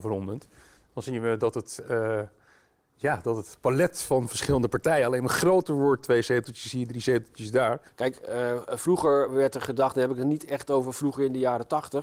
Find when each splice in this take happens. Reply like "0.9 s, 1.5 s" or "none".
7.9 s

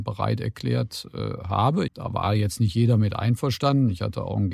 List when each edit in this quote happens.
1.9 s

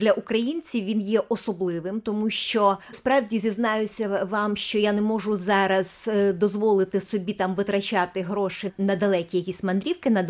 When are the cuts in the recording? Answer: 2.9 s

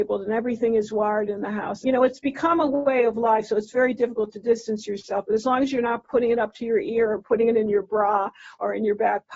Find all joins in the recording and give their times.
1.8 s

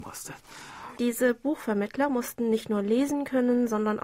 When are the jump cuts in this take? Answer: 0.9 s

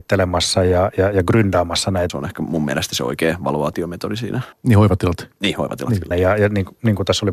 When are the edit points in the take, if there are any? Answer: 2.1 s, 4.5 s, 6.1 s

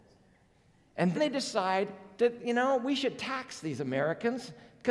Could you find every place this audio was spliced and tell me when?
1.1 s

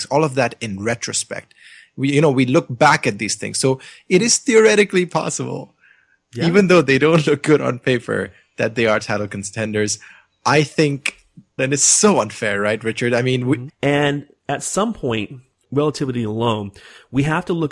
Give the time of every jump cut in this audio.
11.6 s, 13.7 s, 15.6 s

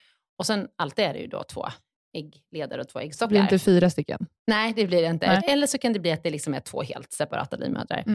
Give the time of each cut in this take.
4.4 s, 5.4 s

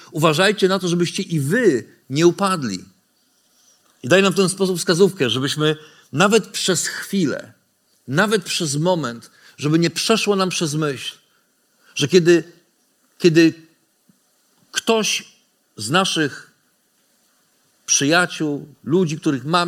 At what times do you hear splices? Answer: none

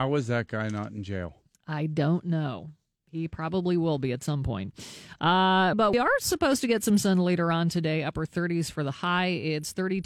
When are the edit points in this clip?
5.7 s

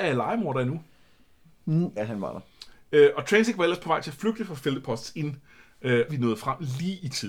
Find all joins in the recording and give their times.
2.0 s, 6.1 s

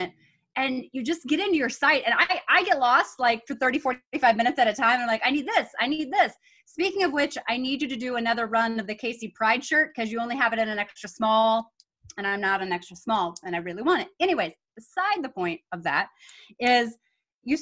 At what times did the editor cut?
none

